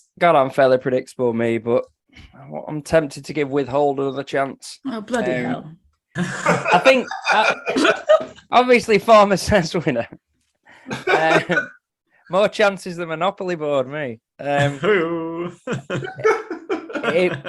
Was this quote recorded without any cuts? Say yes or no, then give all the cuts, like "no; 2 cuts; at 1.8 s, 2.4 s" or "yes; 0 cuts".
yes; 0 cuts